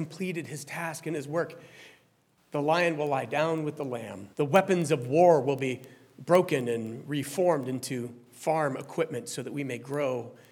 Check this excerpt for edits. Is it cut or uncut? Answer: cut